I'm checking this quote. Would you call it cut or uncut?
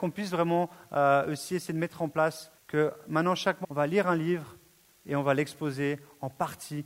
cut